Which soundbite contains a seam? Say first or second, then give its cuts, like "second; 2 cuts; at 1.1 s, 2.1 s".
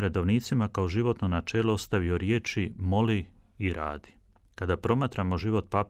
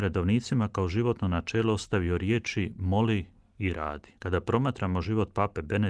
second; 1 cut; at 4.2 s